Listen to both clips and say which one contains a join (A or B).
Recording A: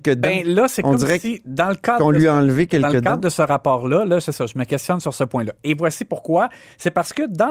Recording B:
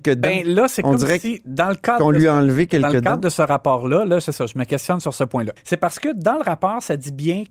B